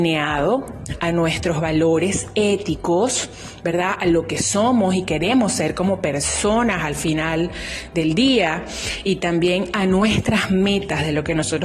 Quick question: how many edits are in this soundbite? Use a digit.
0